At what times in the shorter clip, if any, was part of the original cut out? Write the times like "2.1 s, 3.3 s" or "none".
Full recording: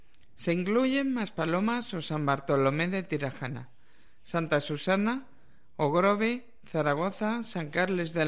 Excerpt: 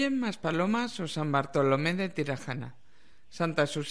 none